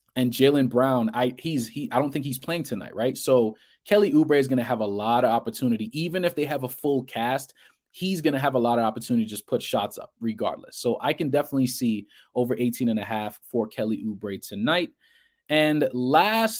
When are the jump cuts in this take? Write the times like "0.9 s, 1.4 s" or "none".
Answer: none